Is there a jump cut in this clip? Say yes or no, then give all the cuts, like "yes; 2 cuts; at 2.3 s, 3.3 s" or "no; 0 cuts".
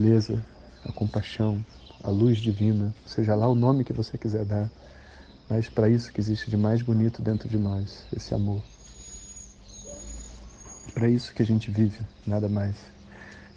no; 0 cuts